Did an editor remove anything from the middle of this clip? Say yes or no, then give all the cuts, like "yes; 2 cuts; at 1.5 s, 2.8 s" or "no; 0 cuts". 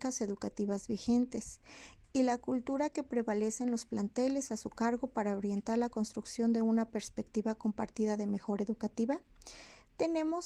no; 0 cuts